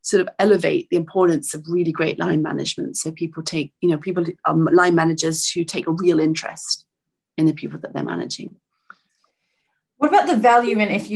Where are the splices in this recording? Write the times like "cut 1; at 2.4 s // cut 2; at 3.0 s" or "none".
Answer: none